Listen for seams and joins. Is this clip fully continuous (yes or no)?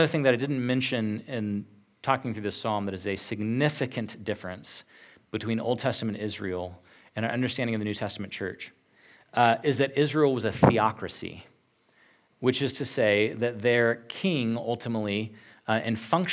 yes